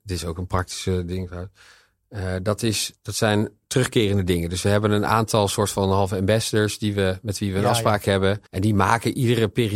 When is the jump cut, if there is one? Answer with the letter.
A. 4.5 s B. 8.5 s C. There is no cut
B